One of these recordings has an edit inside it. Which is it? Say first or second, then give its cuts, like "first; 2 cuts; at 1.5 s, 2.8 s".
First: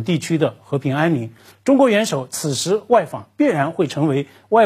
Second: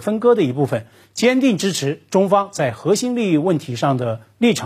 first; 1 cut; at 1.5 s